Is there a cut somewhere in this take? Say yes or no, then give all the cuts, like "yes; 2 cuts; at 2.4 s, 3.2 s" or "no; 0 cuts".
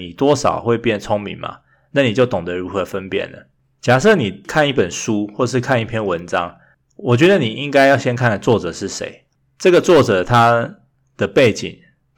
no; 0 cuts